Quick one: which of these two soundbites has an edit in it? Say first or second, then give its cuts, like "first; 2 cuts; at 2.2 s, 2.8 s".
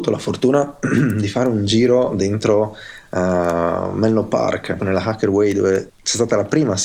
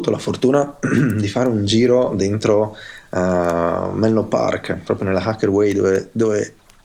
first; 2 cuts; at 4.8 s, 5.9 s